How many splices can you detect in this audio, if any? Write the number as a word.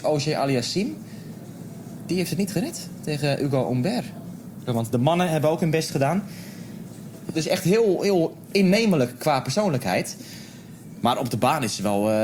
two